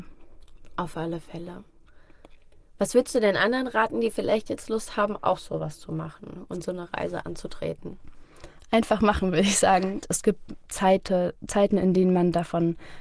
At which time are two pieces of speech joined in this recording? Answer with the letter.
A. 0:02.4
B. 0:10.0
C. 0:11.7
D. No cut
B